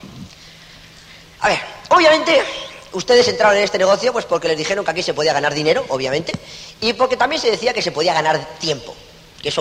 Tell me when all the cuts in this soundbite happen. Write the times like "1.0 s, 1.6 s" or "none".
none

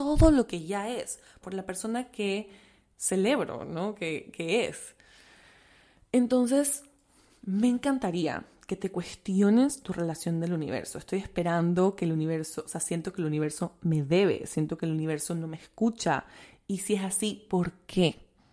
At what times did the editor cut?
1.4 s

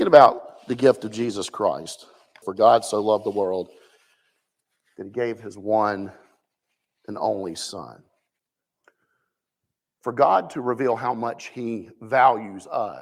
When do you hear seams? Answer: 2.4 s

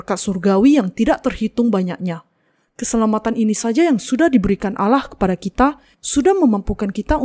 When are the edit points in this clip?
5.9 s

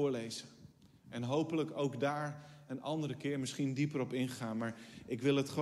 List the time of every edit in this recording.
none

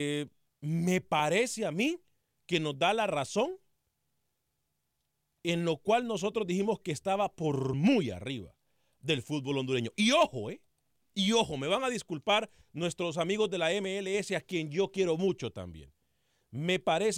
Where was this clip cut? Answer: none

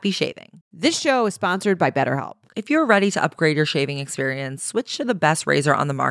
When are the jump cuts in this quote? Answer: 2.5 s

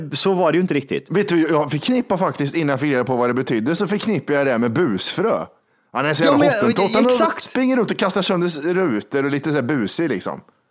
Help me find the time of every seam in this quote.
none

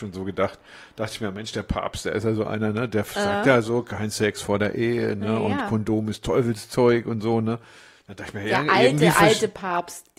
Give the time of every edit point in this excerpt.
none

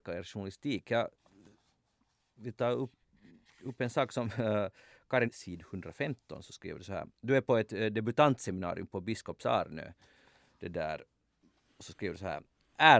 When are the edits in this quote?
5.3 s

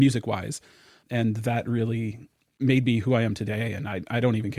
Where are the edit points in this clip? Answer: none

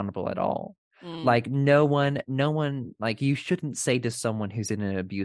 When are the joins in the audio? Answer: none

